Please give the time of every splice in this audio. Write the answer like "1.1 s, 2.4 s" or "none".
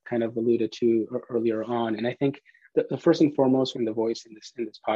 3.7 s

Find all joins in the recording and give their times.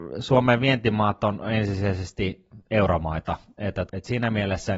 3.9 s

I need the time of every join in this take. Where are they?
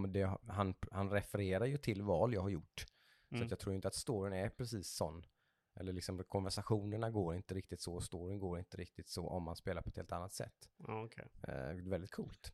none

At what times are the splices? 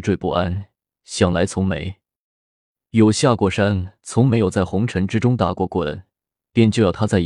none

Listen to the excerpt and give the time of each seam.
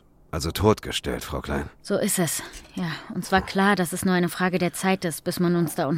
none

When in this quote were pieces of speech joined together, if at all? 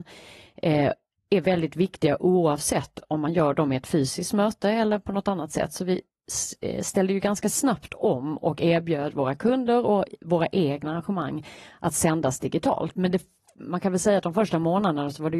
12.9 s

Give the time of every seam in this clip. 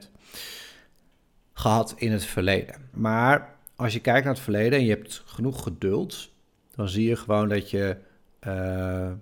2.9 s

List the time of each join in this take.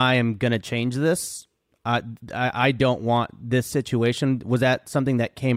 none

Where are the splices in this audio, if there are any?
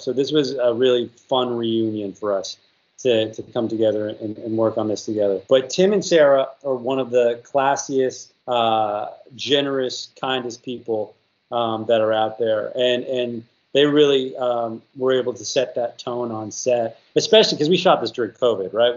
5.4 s, 8.4 s

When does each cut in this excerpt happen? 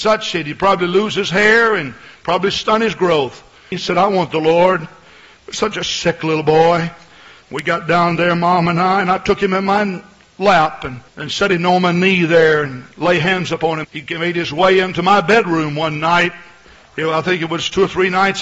3.7 s, 11.1 s, 13.8 s

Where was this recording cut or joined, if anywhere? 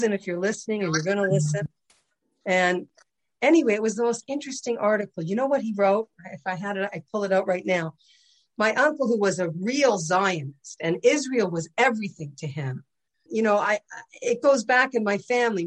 13.3 s

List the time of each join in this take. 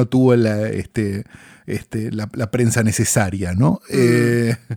none

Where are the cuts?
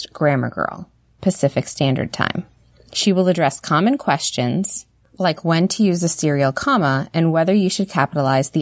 1.2 s

